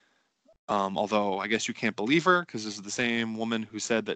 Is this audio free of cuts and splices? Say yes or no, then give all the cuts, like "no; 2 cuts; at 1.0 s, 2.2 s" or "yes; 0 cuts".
yes; 0 cuts